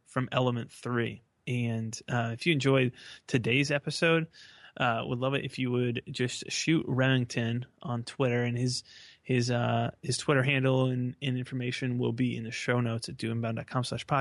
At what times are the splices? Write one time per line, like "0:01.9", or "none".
0:01.4